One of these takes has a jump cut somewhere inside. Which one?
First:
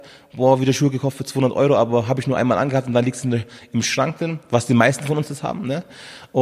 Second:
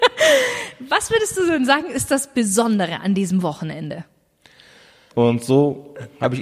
second; 1 cut; at 5.1 s

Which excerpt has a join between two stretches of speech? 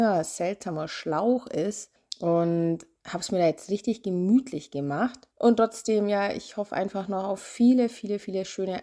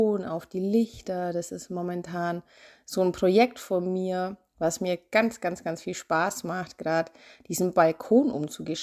first; 1 cut; at 5.3 s

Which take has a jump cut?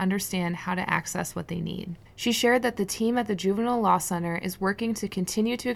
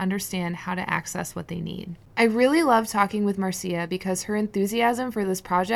first; 1 cut; at 2.1 s

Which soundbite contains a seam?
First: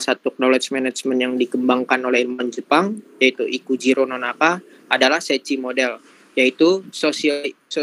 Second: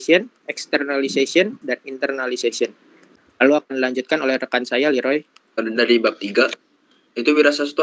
second; 1 cut; at 1.6 s

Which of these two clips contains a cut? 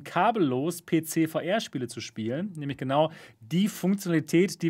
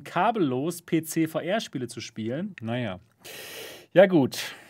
second; 1 cut; at 2.5 s

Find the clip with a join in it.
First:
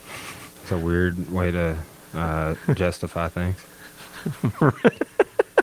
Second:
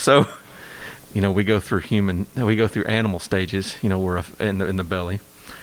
second; 1 cut; at 1.0 s

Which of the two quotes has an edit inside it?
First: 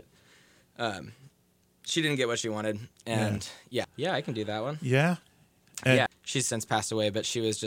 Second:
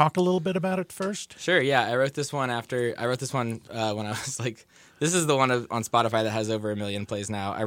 first; 2 cuts; at 3.8 s, 6.1 s

